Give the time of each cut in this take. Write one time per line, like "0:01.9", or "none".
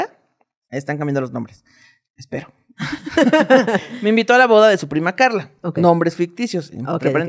none